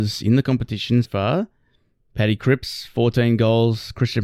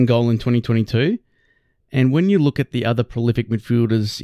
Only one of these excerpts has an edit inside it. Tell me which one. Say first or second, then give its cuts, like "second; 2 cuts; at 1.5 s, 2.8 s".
first; 1 cut; at 1.0 s